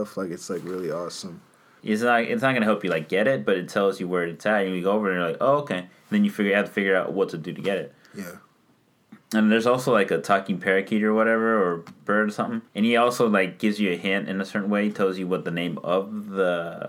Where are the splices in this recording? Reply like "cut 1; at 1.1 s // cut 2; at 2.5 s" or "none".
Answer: cut 1; at 1.8 s // cut 2; at 12.7 s